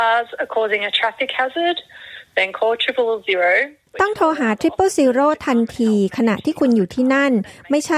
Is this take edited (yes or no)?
yes